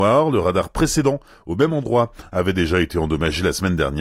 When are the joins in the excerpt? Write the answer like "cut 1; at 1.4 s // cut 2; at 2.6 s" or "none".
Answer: none